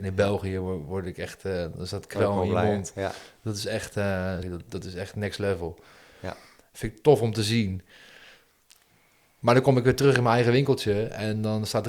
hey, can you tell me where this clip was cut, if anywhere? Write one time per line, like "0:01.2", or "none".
0:04.4

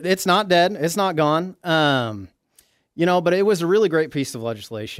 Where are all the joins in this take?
none

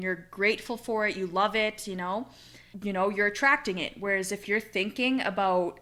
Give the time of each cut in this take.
0:02.7

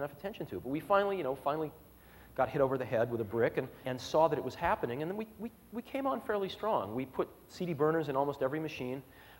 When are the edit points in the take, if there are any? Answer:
0:03.8

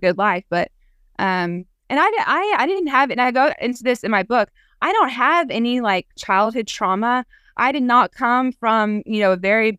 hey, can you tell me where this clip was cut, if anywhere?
none

